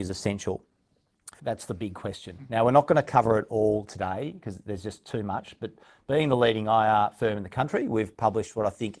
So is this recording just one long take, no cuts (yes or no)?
no